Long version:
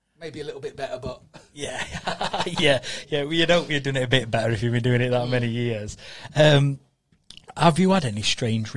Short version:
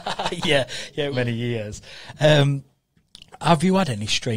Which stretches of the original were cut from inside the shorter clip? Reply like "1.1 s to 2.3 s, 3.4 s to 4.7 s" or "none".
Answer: 3.3 s to 5.3 s